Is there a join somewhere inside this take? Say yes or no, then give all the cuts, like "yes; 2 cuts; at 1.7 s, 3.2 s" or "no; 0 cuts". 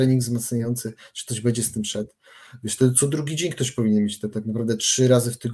no; 0 cuts